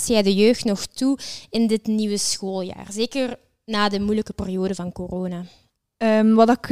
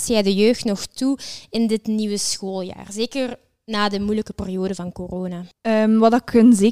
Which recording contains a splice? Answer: second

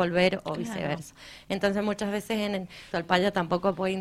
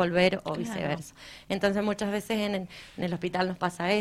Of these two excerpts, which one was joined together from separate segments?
first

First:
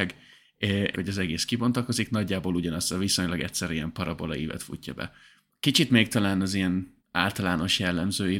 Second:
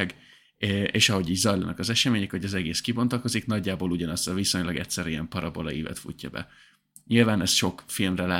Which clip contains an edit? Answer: first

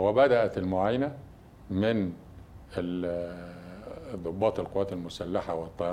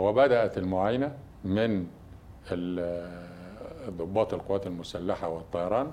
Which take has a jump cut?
second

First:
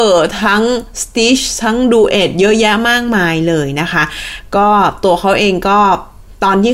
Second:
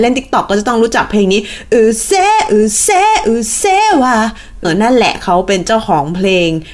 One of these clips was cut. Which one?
second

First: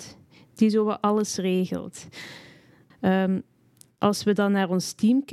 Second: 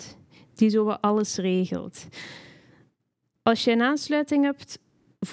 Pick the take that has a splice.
first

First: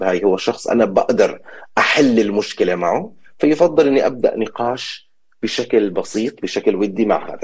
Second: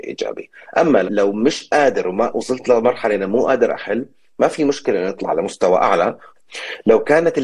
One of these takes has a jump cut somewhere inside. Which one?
second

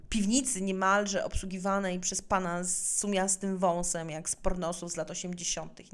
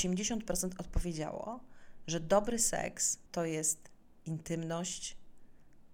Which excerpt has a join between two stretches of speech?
second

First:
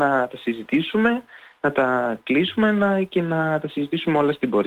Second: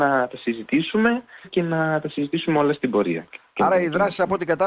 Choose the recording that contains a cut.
second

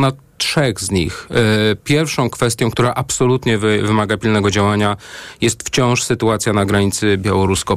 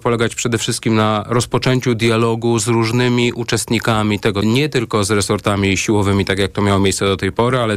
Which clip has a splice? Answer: second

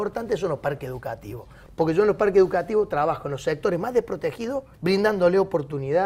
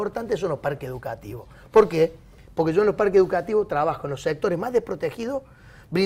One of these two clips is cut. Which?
first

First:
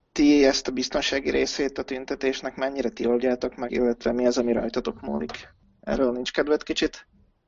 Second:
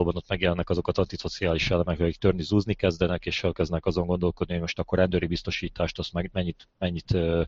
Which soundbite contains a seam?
first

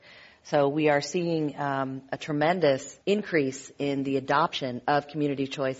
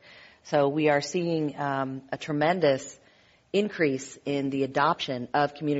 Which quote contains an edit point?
first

